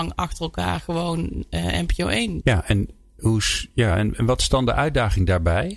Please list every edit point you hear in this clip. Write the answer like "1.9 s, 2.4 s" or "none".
2.4 s